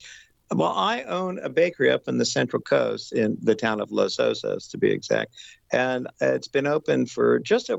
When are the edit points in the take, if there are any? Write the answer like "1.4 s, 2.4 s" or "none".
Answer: none